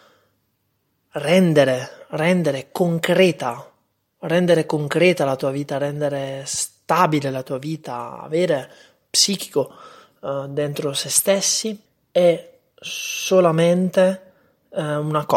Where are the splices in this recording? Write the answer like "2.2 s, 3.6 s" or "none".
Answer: 9.1 s